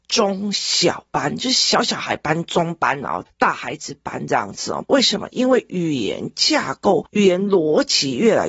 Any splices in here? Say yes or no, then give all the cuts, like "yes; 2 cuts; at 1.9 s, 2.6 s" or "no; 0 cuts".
yes; 1 cut; at 4.9 s